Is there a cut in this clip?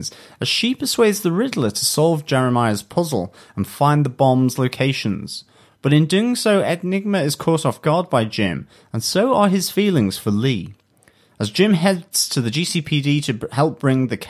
no; 0 cuts

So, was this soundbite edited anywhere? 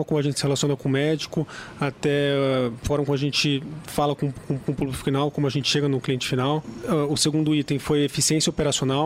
no; 0 cuts

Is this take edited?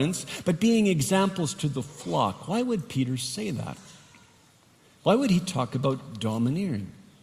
no; 0 cuts

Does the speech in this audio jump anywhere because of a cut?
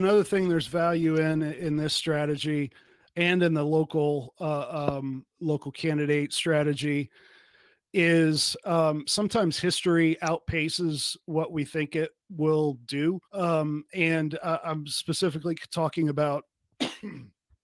yes; 3 cuts; at 5.3 s, 12.2 s, 13.2 s

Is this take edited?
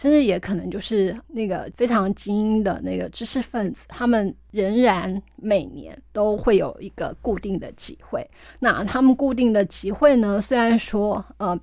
no; 0 cuts

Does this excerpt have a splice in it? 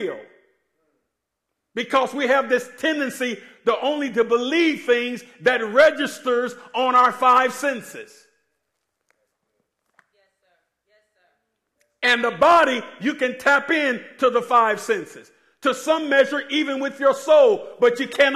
no; 0 cuts

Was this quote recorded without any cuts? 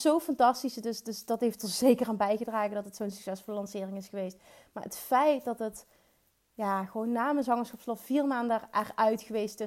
yes; 0 cuts

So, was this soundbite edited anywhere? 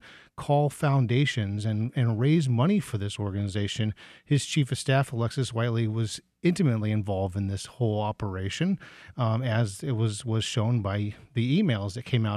no; 0 cuts

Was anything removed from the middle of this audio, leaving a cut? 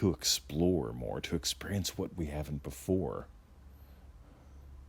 no; 0 cuts

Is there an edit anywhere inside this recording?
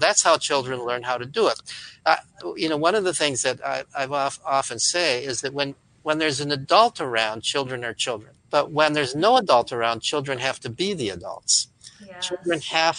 yes; 1 cut; at 8.4 s

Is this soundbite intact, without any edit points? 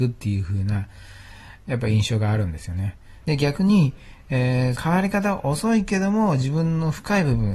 no; 2 cuts; at 3.2 s, 4.7 s

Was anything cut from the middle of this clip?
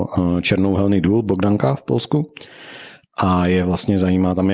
no; 0 cuts

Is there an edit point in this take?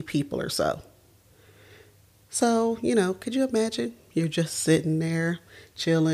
no; 0 cuts

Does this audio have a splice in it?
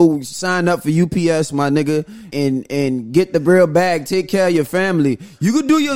yes; 1 cut; at 2.3 s

